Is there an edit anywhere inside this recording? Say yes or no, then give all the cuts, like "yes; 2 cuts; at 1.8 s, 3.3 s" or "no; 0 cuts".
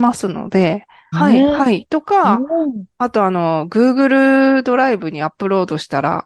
yes; 1 cut; at 1.1 s